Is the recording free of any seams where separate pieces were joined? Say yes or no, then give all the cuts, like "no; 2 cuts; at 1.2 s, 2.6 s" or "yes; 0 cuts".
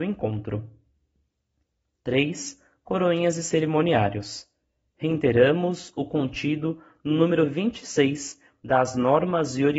yes; 0 cuts